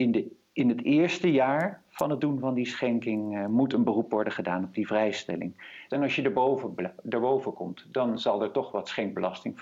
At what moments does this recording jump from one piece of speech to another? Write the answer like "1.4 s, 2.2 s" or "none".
5.9 s

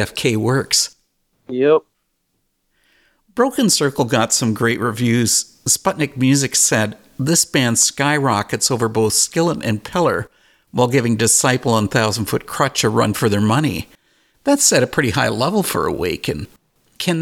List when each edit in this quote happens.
none

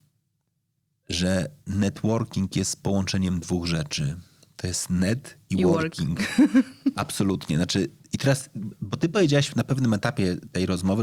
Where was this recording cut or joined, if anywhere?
none

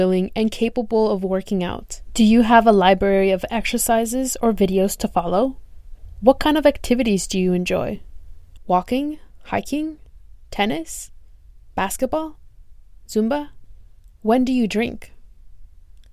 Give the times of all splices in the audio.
none

